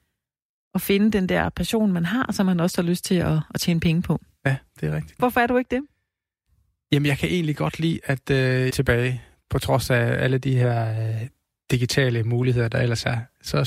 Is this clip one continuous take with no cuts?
no; 2 cuts; at 5.2 s, 8.7 s

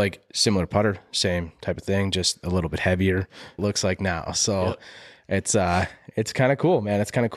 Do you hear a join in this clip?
yes; 1 cut; at 3.6 s

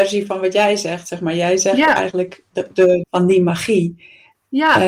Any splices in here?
yes; 1 cut; at 3.0 s

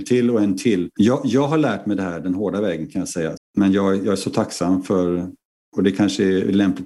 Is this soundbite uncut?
no; 2 cuts; at 1.0 s, 3.4 s

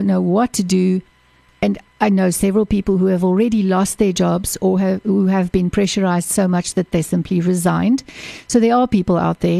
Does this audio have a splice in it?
no; 0 cuts

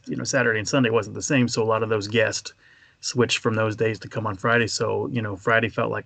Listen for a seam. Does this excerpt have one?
no; 0 cuts

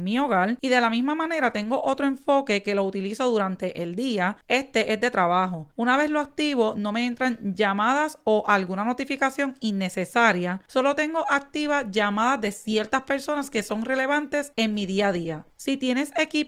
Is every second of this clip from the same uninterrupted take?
yes; 0 cuts

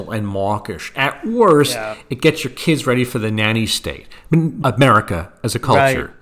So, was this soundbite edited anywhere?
yes; 1 cut; at 4.6 s

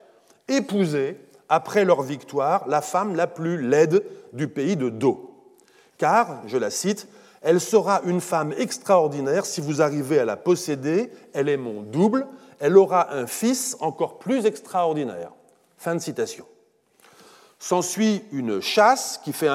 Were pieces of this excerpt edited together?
yes; 1 cut; at 6.4 s

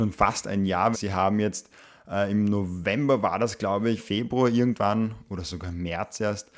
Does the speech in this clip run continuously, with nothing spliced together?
no; 2 cuts; at 0.9 s, 4.0 s

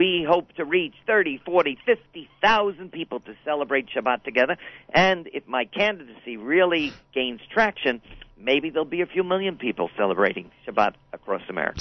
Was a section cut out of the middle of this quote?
no; 0 cuts

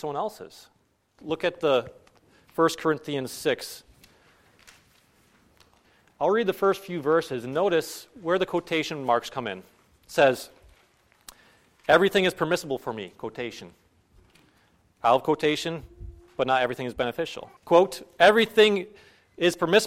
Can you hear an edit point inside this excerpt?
yes; 2 cuts; at 1.2 s, 17.6 s

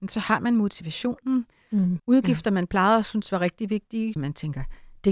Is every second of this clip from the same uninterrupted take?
no; 2 cuts; at 2.0 s, 4.2 s

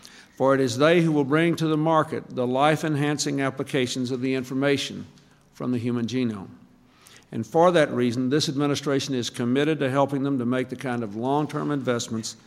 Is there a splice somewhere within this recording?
no; 0 cuts

